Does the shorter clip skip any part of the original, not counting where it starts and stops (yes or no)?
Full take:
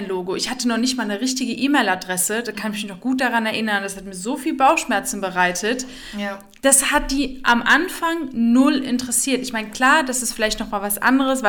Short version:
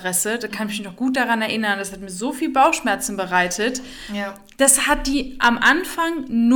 no